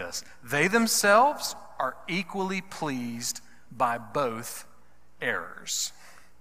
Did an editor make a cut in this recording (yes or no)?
no